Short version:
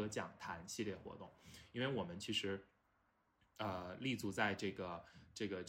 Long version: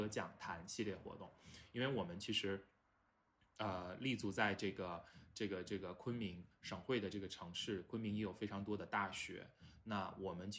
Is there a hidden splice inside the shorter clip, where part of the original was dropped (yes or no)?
no